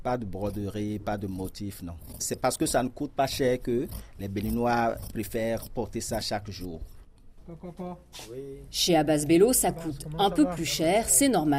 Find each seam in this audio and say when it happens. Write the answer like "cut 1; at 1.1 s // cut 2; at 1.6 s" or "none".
none